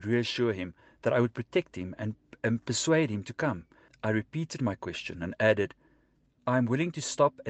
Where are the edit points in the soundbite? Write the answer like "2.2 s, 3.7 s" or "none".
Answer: 3.9 s